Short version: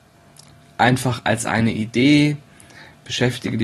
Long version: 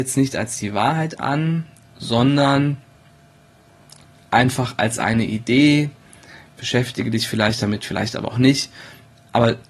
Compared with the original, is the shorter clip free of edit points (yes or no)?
yes